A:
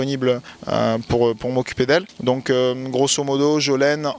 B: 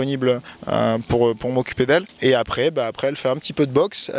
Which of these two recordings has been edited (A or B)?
B